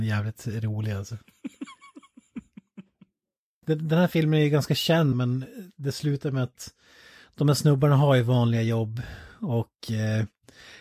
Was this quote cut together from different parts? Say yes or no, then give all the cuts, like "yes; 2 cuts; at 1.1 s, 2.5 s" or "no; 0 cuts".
yes; 2 cuts; at 3.6 s, 5.1 s